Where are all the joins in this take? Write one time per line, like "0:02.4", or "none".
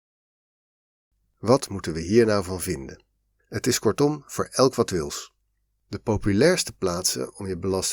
0:03.4